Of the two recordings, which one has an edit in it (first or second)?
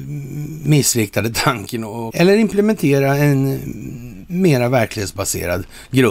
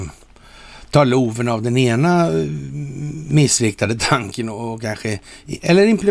first